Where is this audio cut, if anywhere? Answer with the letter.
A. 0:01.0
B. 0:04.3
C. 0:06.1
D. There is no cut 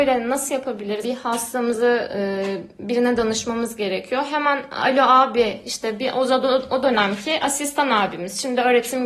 A